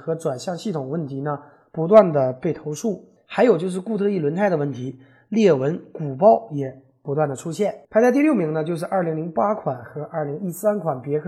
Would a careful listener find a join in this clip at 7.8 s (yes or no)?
yes